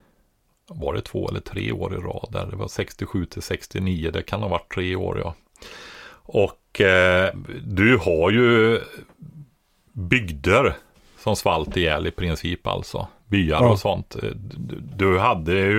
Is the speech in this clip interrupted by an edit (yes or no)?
no